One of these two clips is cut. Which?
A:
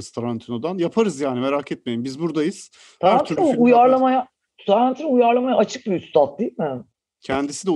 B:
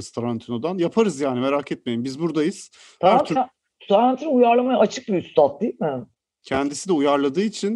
B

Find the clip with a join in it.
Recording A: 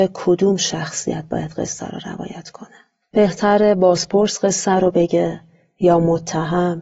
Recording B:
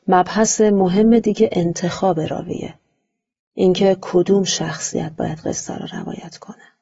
A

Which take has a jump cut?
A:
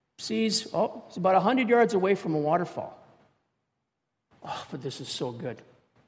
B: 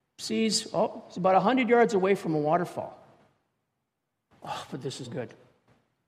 B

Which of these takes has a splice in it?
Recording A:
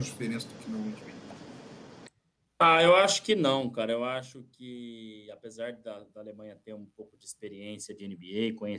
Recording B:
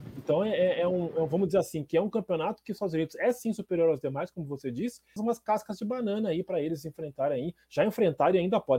B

